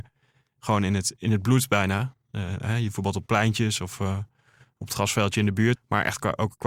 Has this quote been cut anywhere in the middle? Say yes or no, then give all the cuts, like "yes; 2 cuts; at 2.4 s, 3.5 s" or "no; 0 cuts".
yes; 1 cut; at 5.7 s